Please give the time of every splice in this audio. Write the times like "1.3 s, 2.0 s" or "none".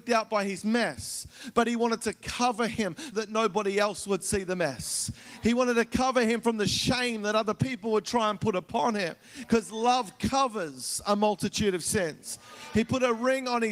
3.1 s